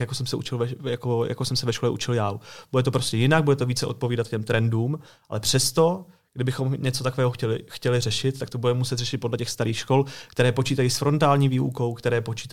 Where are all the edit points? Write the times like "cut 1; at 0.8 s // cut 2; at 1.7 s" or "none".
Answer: none